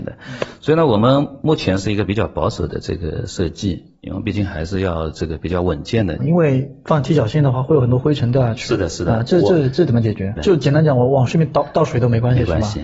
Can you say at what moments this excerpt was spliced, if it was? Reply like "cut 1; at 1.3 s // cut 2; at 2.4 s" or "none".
cut 1; at 6.2 s // cut 2; at 10.4 s

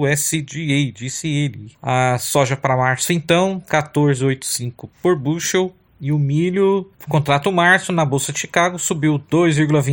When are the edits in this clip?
cut 1; at 1.8 s // cut 2; at 3.7 s

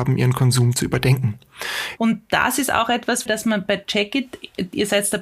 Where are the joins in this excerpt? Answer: cut 1; at 2.0 s // cut 2; at 3.3 s

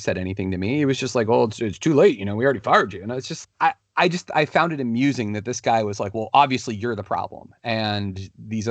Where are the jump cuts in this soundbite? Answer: cut 1; at 3.4 s

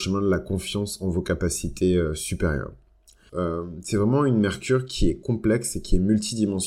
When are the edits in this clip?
cut 1; at 3.3 s

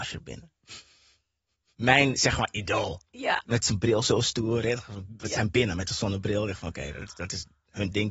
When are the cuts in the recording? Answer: none

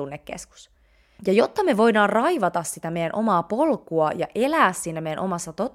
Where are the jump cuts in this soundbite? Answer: cut 1; at 1.2 s

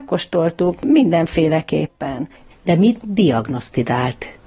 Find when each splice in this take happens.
cut 1; at 2.5 s

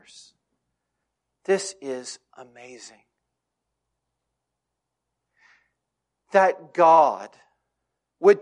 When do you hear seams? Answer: none

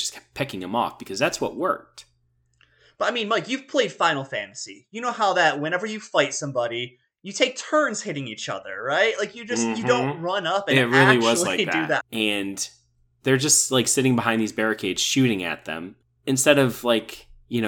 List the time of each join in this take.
cut 1; at 12.0 s

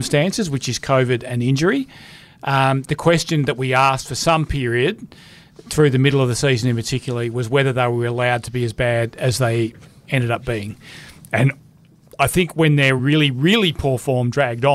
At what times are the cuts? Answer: cut 1; at 13.0 s

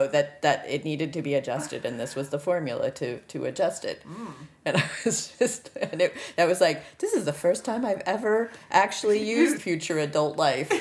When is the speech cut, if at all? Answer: cut 1; at 9.5 s

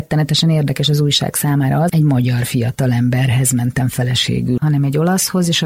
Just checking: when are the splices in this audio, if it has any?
cut 1; at 1.9 s // cut 2; at 4.6 s

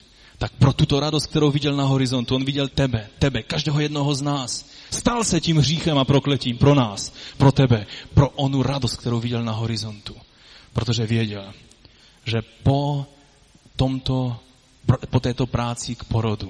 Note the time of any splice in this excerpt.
cut 1; at 2.7 s // cut 2; at 4.9 s

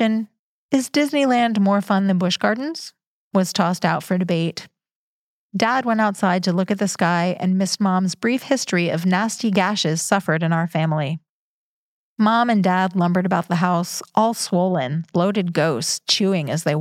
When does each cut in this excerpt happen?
cut 1; at 15.1 s

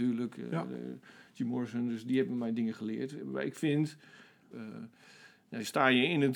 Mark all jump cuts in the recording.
cut 1; at 4.5 s

